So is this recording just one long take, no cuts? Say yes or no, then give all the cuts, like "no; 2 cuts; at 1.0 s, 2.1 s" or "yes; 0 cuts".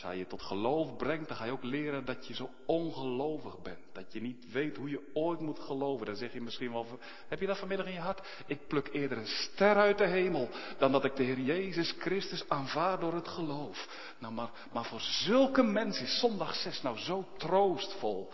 yes; 0 cuts